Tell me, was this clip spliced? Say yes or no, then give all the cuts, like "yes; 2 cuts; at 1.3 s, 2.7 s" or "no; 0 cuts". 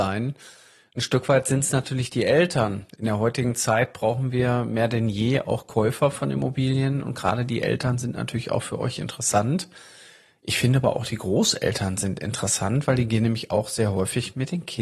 no; 0 cuts